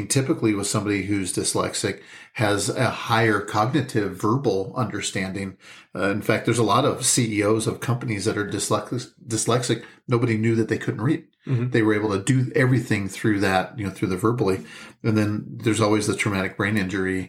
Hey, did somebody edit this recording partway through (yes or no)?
no